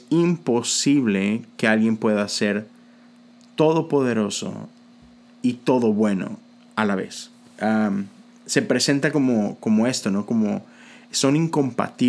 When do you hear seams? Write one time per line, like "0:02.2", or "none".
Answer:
none